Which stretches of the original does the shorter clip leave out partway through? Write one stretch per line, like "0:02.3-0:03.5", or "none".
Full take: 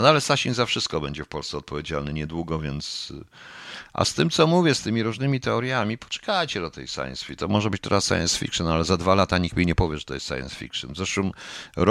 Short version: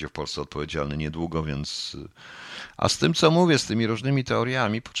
none